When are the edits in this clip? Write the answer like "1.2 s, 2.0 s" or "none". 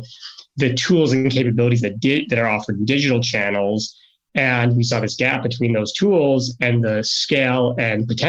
none